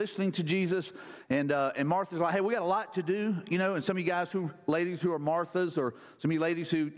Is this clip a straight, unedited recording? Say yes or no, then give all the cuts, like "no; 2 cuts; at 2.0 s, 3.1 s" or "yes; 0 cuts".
yes; 0 cuts